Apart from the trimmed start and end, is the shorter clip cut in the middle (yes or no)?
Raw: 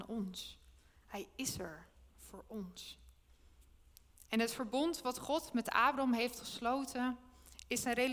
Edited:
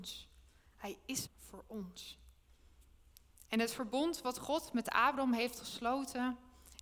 yes